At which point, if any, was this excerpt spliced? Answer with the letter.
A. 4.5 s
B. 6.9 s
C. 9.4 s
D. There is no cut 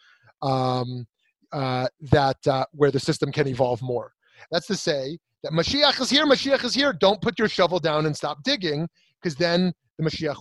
A